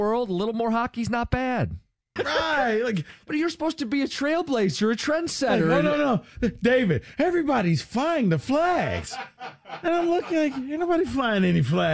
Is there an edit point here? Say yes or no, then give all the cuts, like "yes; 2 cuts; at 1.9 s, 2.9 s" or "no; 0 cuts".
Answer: yes; 1 cut; at 2.2 s